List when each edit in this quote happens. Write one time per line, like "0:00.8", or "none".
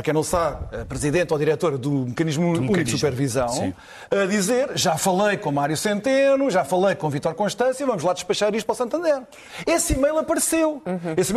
none